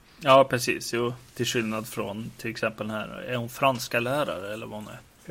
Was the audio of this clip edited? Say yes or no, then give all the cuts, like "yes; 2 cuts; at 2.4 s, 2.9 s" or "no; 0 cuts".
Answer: no; 0 cuts